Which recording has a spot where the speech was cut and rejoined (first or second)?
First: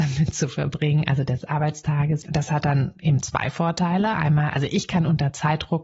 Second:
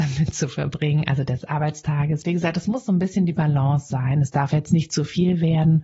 first